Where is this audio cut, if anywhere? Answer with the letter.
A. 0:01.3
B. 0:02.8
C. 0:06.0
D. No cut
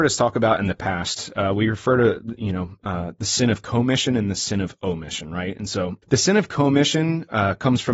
C